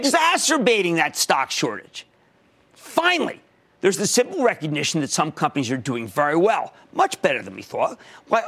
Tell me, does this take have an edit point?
no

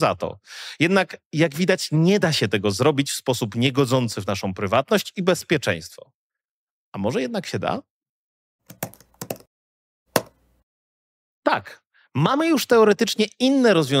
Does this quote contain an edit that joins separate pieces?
no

